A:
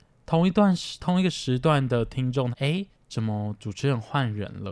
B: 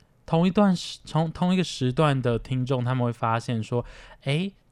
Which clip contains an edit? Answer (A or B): A